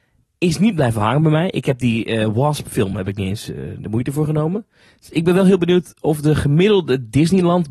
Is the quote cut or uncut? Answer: uncut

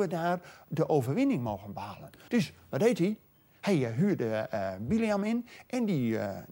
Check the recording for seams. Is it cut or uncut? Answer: cut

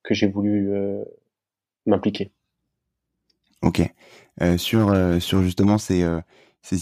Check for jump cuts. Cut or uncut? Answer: uncut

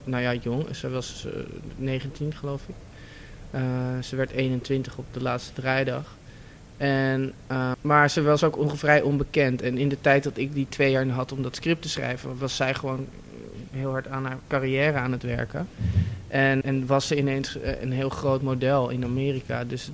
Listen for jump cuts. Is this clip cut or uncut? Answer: cut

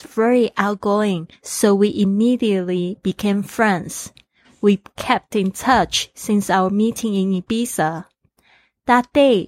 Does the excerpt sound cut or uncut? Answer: uncut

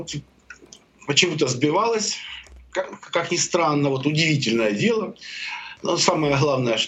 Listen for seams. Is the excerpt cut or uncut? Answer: uncut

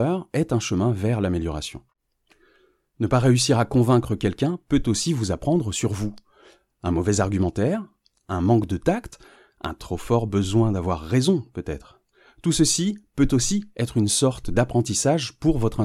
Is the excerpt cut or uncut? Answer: uncut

